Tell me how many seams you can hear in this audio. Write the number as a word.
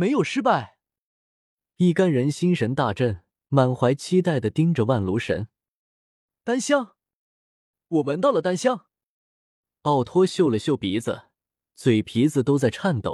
one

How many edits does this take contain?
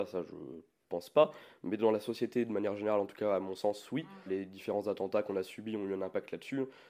one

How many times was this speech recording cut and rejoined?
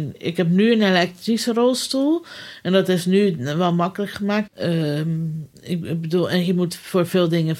one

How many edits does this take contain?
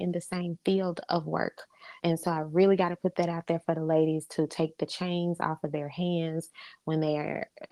one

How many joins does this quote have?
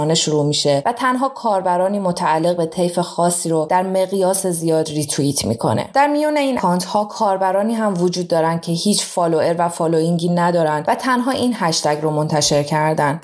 one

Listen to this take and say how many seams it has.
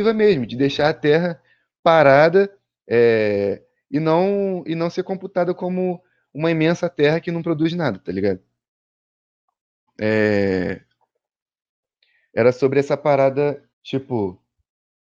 two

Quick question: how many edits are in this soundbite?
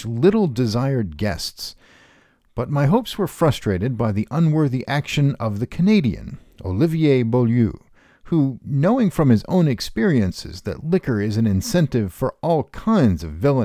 zero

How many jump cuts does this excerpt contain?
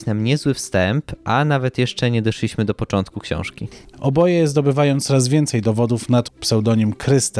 two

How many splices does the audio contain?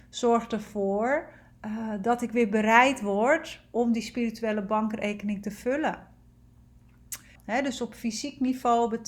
one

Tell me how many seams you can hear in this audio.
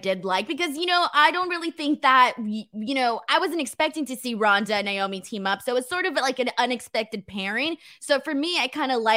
zero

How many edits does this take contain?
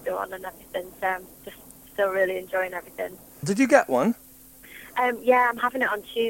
one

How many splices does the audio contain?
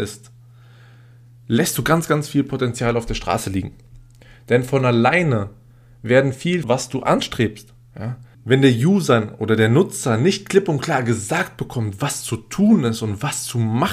two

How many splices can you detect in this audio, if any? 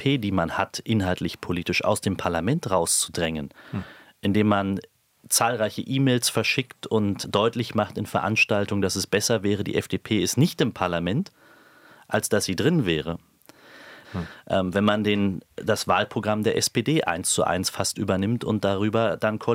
three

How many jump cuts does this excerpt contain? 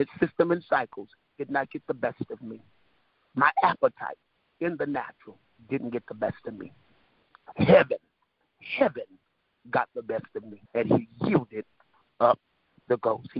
two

